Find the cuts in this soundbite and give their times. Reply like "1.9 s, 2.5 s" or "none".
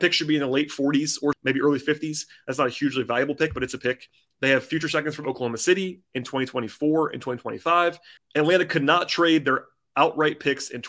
1.3 s, 8.2 s